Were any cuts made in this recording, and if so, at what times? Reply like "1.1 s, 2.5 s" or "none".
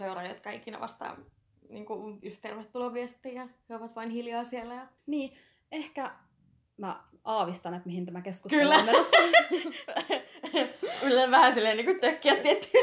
5.0 s